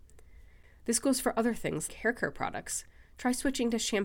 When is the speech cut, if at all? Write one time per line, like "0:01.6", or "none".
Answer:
0:01.9